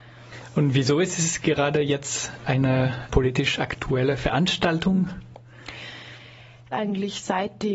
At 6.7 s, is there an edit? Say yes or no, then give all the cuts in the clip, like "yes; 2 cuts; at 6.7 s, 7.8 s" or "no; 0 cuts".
yes; 1 cut; at 6.7 s